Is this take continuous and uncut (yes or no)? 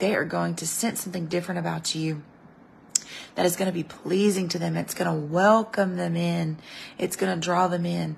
yes